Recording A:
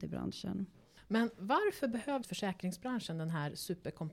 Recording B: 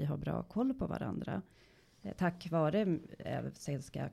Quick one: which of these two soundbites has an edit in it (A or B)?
A